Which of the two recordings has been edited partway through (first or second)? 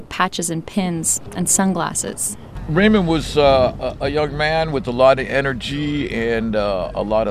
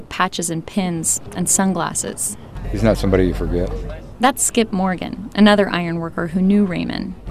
second